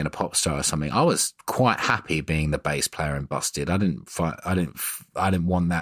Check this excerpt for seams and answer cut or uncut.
uncut